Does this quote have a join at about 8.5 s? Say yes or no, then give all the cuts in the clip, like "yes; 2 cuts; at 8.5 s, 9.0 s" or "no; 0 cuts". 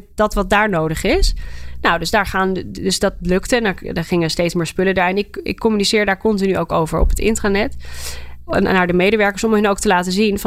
yes; 1 cut; at 8.5 s